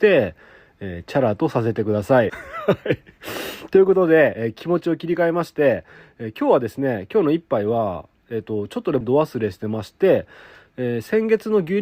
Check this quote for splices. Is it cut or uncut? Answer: cut